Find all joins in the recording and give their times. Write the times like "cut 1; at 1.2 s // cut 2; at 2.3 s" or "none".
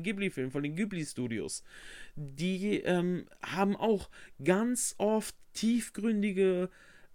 none